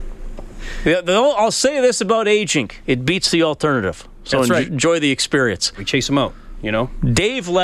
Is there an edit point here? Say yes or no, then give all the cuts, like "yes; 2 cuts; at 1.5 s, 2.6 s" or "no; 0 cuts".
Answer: yes; 1 cut; at 5.8 s